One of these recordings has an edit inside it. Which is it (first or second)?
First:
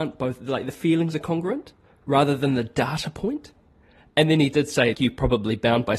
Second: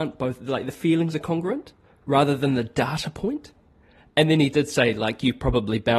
first